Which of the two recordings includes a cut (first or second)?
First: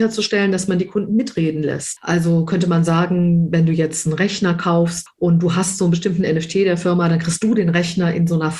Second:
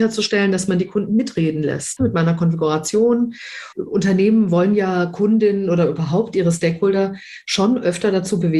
second